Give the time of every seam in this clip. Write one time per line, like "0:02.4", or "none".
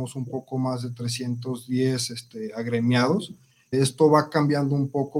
0:03.7